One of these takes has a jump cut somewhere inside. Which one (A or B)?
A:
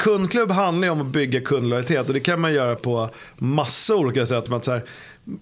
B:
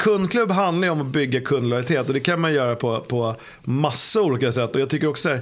A